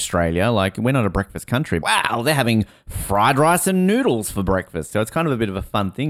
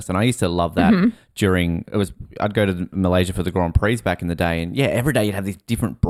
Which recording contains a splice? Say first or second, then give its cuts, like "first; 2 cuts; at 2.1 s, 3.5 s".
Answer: first; 2 cuts; at 1.8 s, 4.9 s